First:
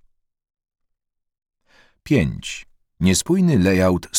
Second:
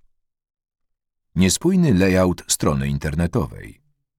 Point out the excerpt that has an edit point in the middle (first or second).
second